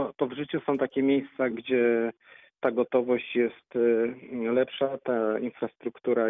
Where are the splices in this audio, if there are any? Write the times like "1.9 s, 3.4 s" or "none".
1.5 s